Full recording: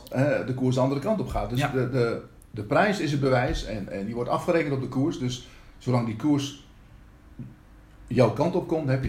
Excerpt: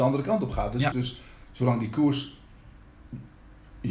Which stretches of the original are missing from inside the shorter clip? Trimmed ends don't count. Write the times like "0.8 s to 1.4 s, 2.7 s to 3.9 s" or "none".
1.7 s to 5.2 s